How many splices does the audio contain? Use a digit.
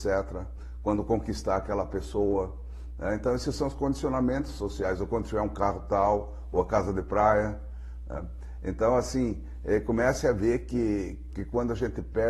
1